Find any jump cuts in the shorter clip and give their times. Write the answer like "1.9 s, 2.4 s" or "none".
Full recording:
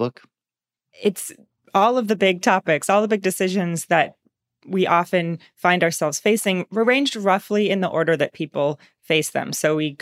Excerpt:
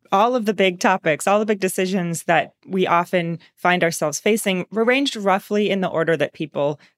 2.6 s